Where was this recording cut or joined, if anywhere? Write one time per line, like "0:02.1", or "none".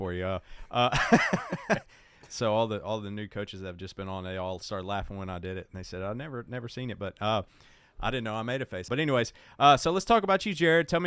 0:08.9